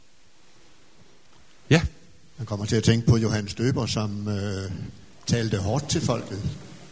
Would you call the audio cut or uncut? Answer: uncut